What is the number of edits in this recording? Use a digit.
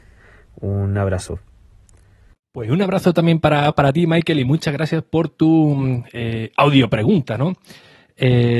0